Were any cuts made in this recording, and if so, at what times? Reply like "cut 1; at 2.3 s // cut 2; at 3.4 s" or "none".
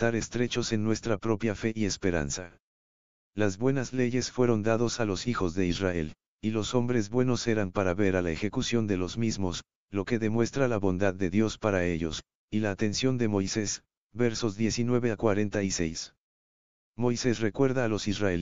none